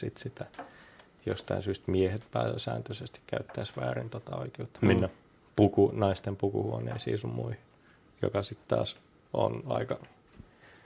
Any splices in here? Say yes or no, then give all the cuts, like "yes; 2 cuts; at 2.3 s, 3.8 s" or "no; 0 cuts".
no; 0 cuts